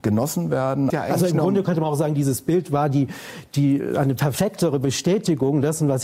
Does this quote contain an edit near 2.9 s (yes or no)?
no